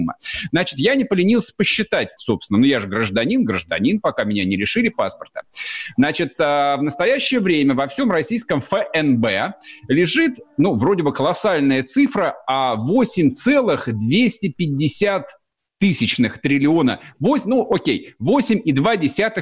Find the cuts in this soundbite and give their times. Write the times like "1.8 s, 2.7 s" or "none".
2.2 s